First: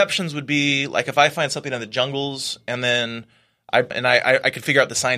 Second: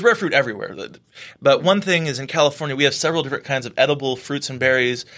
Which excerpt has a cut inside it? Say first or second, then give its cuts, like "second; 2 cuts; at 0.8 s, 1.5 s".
first; 1 cut; at 3.9 s